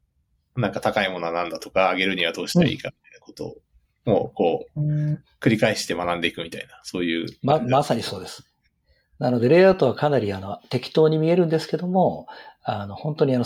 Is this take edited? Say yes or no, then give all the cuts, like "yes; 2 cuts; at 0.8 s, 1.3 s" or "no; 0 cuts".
no; 0 cuts